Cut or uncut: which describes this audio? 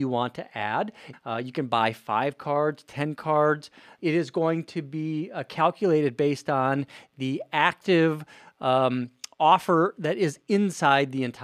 cut